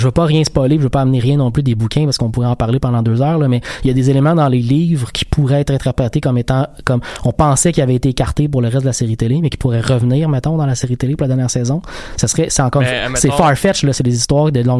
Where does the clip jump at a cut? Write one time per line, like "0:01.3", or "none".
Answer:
none